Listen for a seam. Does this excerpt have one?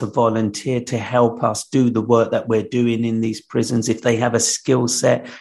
no; 0 cuts

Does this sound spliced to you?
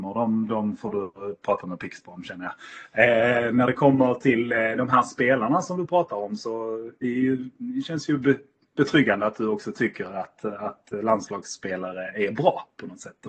no; 0 cuts

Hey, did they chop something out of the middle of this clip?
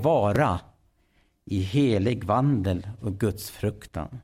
no; 0 cuts

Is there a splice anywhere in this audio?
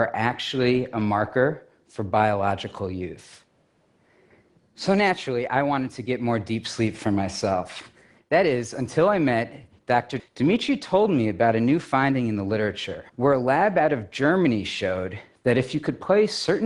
yes; 3 cuts; at 8.2 s, 10.2 s, 13.1 s

